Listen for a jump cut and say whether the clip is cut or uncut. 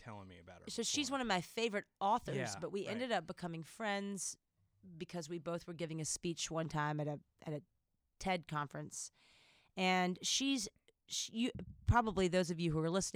uncut